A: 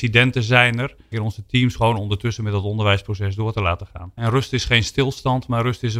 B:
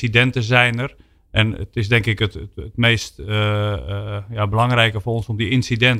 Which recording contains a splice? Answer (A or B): A